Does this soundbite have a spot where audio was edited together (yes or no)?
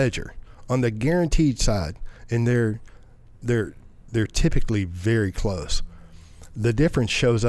no